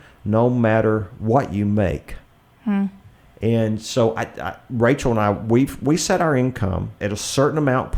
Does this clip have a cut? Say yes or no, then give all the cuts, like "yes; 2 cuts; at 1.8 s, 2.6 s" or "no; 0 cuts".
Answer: no; 0 cuts